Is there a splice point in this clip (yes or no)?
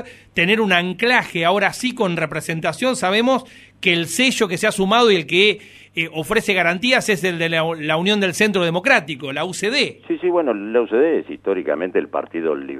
no